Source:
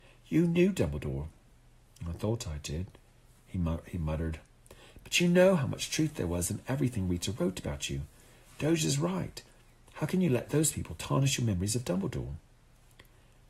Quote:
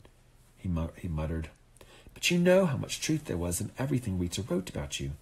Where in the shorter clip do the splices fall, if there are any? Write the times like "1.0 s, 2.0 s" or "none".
none